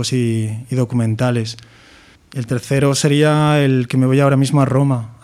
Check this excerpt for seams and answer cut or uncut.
cut